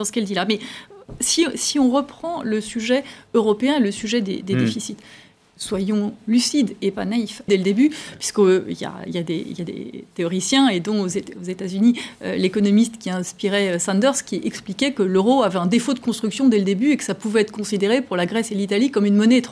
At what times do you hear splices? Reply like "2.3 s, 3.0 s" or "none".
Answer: 7.5 s